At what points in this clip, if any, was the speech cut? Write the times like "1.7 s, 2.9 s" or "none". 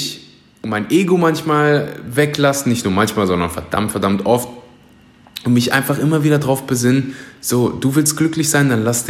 none